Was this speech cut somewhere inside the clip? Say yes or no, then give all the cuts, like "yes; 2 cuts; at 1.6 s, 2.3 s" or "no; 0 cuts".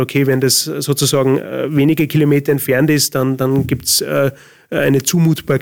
no; 0 cuts